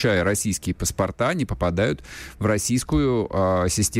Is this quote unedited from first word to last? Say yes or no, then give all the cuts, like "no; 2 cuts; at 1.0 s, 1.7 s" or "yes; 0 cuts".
yes; 0 cuts